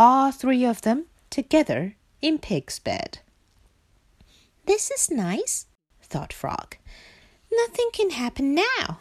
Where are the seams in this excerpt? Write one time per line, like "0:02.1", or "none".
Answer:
none